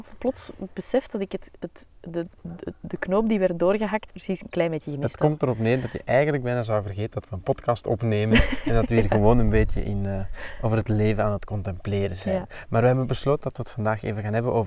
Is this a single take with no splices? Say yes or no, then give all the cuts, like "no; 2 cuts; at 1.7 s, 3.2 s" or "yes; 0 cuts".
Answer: yes; 0 cuts